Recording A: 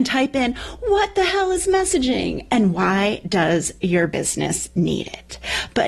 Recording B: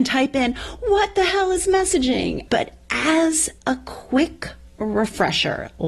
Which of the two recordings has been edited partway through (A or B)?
B